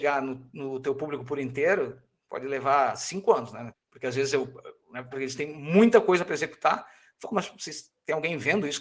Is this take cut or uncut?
cut